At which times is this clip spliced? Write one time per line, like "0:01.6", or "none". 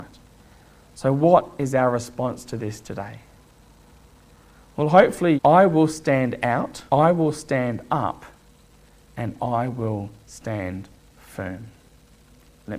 0:05.4
0:06.9